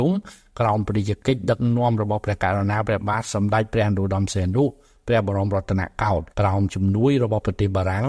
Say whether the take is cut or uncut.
cut